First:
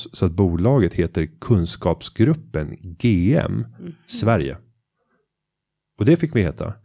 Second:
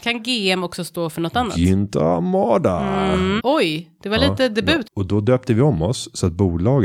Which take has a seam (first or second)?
second